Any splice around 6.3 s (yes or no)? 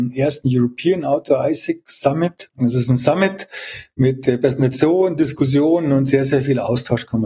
no